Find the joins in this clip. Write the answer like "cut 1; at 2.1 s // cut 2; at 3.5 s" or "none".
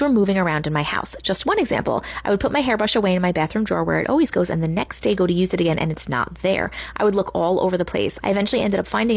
cut 1; at 8.2 s